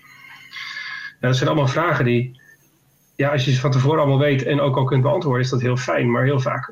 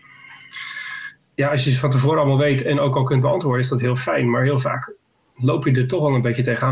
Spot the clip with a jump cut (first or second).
second